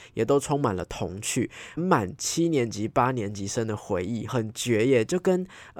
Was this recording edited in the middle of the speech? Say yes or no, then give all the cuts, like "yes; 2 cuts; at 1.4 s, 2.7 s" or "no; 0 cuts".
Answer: yes; 2 cuts; at 1.8 s, 4.3 s